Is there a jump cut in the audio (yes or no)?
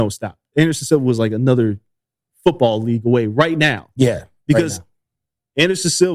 no